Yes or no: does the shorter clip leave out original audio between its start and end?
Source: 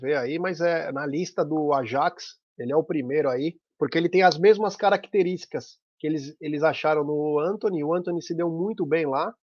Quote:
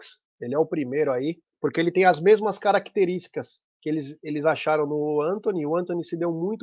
no